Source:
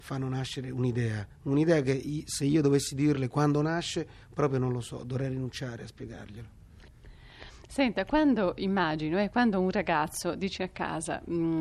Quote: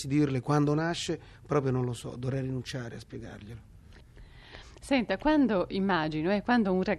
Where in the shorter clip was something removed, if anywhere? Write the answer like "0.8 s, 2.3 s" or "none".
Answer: none